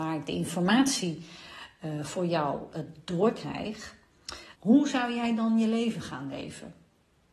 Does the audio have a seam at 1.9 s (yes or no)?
no